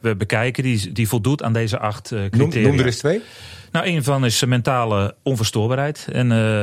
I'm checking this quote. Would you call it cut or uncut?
uncut